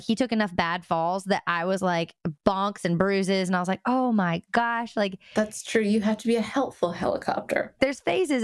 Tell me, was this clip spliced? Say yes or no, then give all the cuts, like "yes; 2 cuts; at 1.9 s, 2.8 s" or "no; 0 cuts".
no; 0 cuts